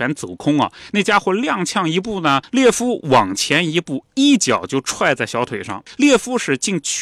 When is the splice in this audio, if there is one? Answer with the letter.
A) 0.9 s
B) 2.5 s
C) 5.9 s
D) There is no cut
D